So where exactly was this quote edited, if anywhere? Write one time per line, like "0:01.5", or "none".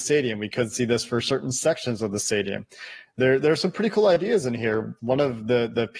0:05.0